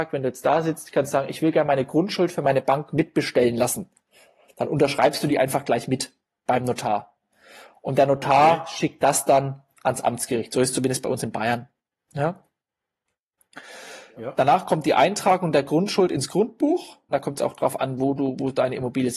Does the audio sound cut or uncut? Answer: cut